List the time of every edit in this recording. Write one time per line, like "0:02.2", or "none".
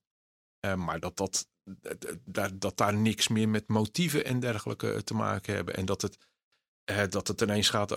none